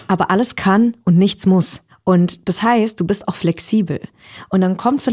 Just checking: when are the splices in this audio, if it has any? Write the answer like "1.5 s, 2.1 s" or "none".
none